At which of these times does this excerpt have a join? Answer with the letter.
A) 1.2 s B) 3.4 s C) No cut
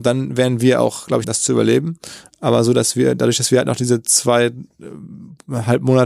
A